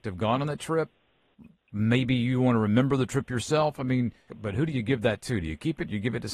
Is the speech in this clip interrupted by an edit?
yes; 1 cut; at 4.3 s

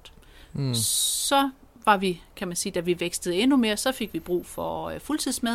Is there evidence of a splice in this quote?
no; 0 cuts

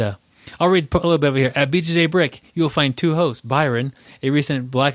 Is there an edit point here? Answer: no; 0 cuts

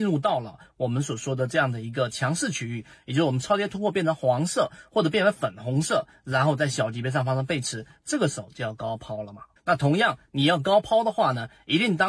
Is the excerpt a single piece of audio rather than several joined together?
no; 1 cut; at 9.6 s

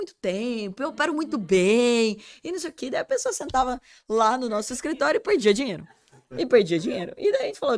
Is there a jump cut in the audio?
no; 0 cuts

